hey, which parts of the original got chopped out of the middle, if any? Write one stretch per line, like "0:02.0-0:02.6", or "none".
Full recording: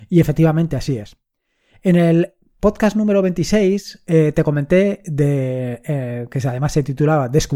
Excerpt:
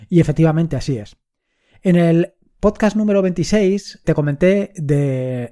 0:04.0-0:04.3